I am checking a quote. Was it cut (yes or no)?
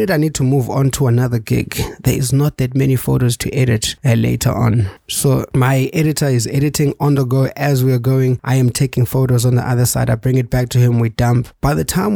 no